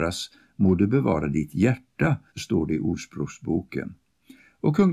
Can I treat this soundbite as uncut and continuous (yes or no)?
no